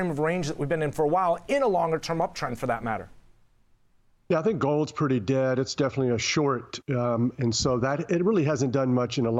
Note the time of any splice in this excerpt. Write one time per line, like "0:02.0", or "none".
none